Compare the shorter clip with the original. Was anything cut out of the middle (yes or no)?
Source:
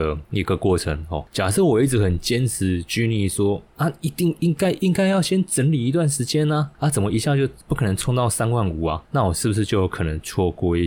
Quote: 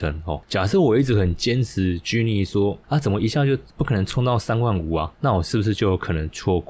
yes